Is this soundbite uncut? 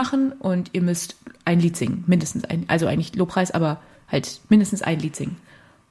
yes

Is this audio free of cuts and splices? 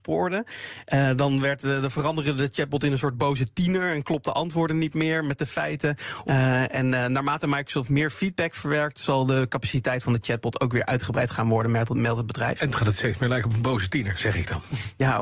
no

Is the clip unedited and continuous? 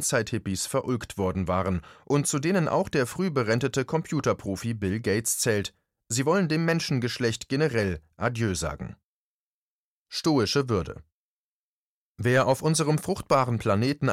yes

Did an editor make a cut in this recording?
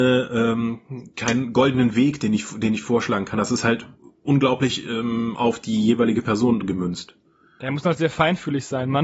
no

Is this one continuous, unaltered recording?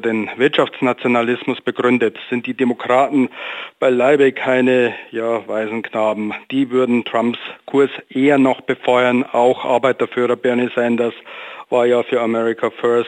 yes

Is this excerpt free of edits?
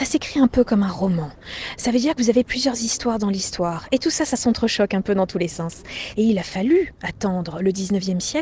no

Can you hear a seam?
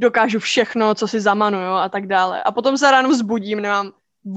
no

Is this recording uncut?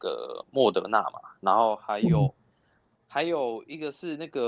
yes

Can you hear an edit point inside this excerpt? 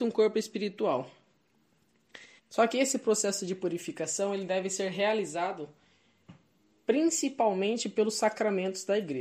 yes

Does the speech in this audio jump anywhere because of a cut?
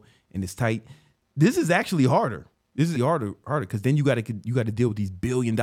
yes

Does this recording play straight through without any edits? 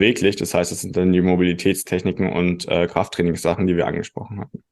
yes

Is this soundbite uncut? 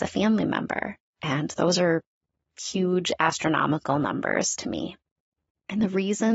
no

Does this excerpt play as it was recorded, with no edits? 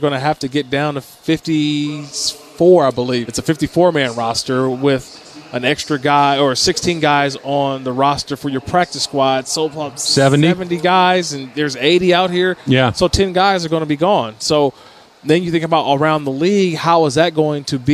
no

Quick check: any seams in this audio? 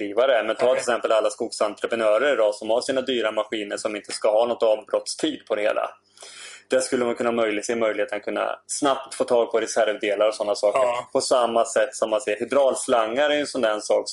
no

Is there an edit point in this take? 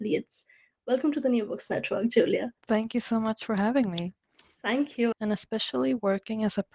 yes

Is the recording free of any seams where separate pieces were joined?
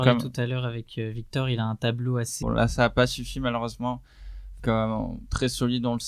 no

